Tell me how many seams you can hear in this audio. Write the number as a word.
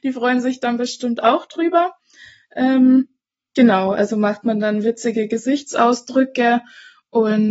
zero